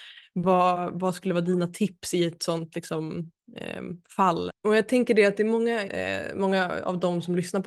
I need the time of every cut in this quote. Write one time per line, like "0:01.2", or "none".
0:04.5
0:05.8